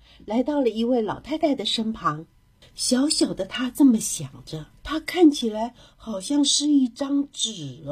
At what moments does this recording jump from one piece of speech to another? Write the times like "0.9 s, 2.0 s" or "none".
2.6 s, 4.8 s